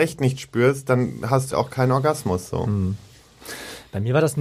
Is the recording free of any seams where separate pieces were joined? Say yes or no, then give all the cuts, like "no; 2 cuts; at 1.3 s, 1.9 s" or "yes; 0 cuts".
no; 1 cut; at 1.5 s